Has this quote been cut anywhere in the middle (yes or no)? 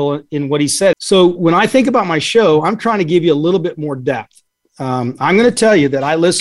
yes